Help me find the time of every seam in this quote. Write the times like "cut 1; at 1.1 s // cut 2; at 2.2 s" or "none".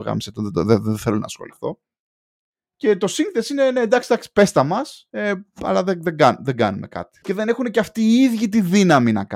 cut 1; at 5.1 s // cut 2; at 7.2 s